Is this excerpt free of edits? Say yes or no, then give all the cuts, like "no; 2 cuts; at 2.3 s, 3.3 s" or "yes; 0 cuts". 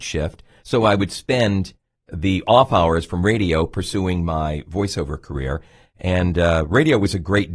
yes; 0 cuts